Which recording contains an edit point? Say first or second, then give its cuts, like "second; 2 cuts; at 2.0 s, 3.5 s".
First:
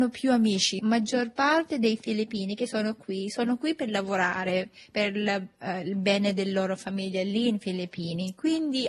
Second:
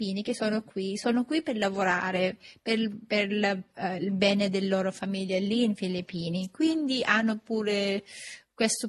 first; 1 cut; at 4.9 s